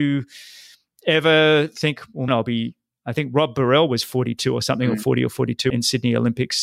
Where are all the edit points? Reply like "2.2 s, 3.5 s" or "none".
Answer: 2.3 s, 5.7 s